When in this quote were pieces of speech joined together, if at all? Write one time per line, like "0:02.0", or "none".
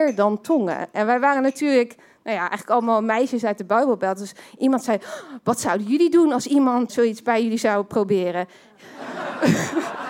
0:06.9
0:08.8